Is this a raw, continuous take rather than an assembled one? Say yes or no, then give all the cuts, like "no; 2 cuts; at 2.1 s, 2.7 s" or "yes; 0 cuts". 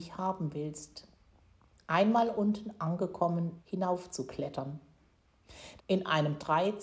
no; 2 cuts; at 3.6 s, 5.8 s